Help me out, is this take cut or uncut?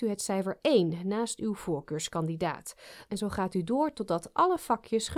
cut